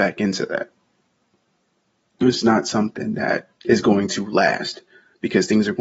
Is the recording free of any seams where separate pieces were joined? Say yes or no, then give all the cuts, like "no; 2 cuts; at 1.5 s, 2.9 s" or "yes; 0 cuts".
no; 2 cuts; at 2.3 s, 3.5 s